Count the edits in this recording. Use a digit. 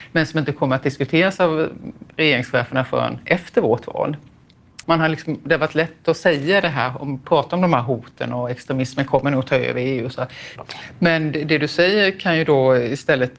2